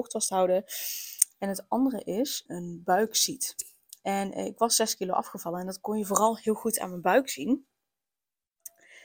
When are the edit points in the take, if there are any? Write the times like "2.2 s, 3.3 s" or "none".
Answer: 1.3 s, 2.5 s